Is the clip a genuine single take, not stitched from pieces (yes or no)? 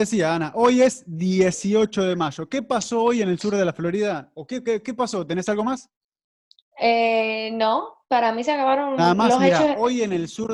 yes